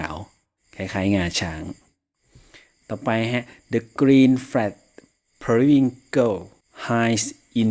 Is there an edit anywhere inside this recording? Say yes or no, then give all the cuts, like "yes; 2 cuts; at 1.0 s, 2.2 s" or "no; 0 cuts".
yes; 1 cut; at 6.6 s